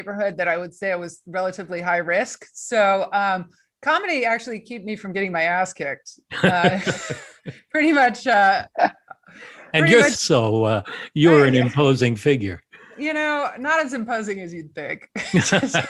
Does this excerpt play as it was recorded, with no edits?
no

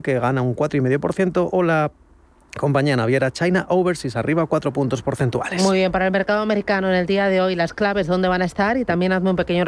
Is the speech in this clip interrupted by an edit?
no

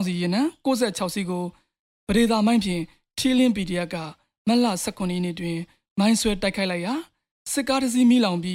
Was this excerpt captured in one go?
yes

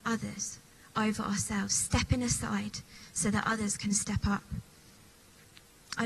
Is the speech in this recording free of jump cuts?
yes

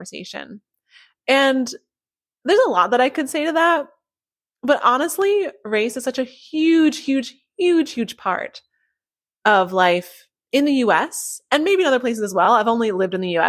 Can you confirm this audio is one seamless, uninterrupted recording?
yes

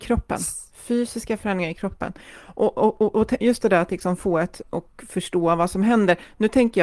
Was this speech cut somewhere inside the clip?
yes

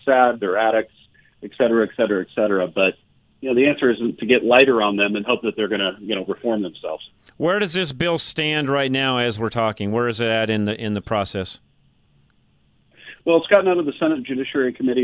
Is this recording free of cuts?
yes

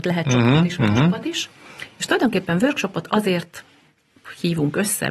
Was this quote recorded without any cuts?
yes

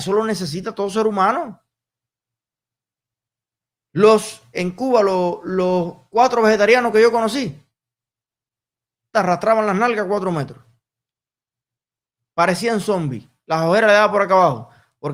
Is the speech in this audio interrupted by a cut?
yes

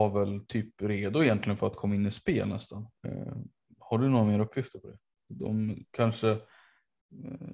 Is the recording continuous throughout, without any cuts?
no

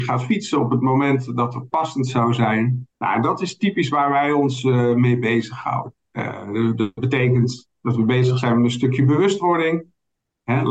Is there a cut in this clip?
yes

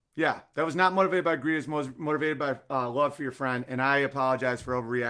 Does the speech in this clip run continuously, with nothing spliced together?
yes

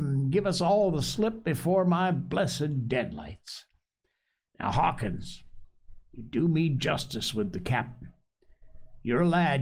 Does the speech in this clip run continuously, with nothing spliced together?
yes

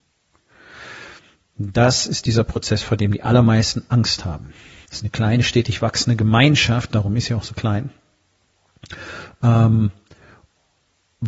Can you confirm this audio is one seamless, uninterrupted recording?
no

